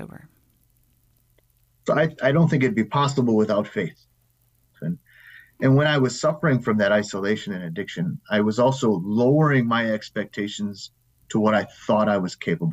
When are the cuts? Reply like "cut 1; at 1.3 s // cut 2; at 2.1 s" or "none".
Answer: cut 1; at 4.7 s